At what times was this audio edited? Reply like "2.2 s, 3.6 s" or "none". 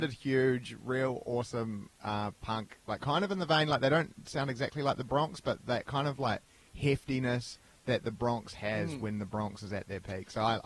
none